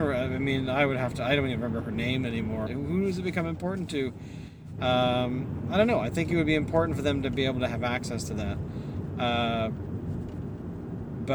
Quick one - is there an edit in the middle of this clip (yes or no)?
yes